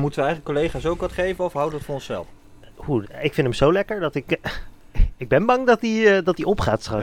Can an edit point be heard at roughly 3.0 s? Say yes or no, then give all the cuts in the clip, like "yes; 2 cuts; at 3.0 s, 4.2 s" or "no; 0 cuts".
yes; 1 cut; at 3.0 s